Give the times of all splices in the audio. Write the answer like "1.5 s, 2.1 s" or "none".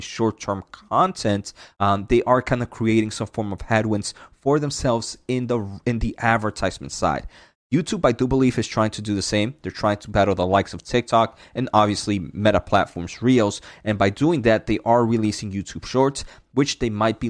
none